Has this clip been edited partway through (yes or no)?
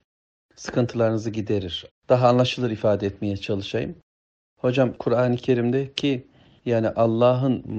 yes